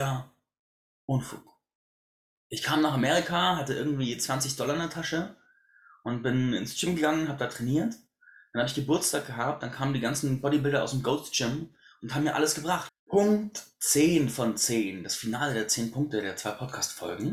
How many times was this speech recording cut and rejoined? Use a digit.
1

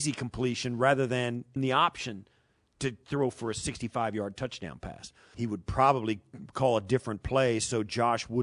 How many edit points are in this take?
2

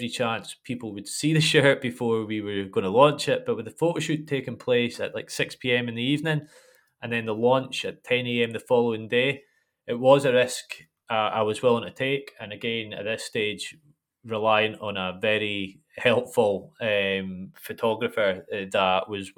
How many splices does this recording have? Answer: 0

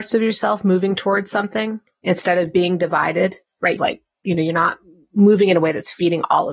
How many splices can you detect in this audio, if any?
1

